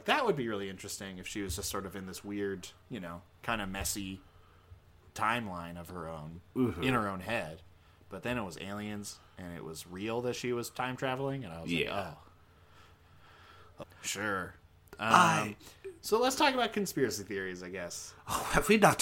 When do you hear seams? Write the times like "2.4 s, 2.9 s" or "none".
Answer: 2.8 s, 13.8 s